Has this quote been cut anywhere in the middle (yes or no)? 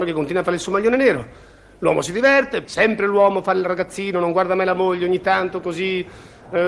yes